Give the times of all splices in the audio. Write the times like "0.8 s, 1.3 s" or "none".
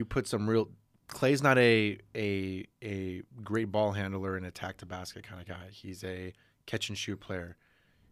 none